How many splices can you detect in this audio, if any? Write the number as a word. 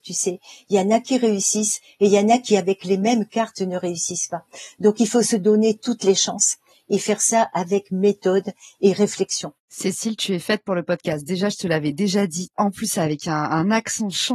one